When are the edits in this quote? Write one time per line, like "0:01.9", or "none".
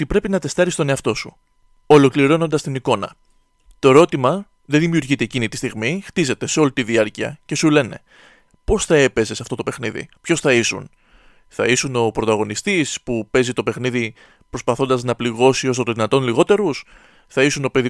0:08.5
0:10.2